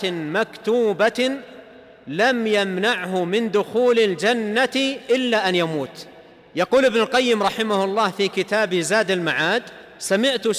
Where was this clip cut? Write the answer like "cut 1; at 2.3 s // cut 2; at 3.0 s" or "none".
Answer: none